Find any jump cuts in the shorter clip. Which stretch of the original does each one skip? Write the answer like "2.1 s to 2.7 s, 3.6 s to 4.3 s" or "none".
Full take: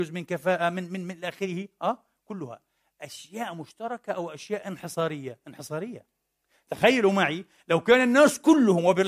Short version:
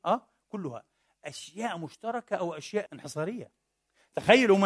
4.6 s to 5.4 s